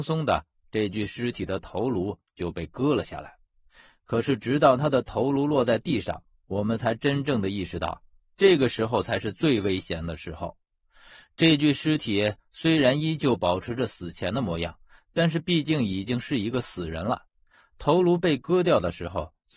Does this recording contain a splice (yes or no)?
no